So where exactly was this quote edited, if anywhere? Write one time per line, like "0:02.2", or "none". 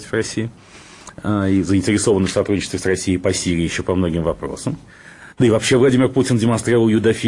0:05.3